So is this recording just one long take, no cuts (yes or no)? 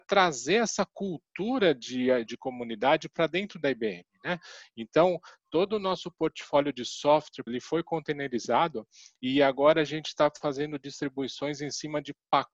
no